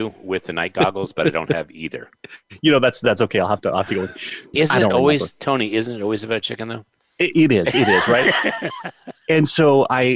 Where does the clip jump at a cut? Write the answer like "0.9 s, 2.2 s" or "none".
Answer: 4.5 s